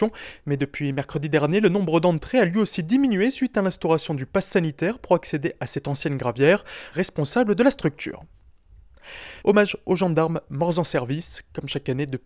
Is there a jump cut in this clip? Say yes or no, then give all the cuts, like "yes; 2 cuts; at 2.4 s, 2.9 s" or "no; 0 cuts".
yes; 2 cuts; at 6.9 s, 9.4 s